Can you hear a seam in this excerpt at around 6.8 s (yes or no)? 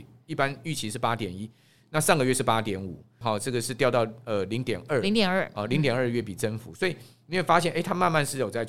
no